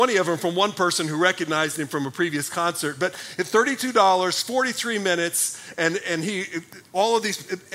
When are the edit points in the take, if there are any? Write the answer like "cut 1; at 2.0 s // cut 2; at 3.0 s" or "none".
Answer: none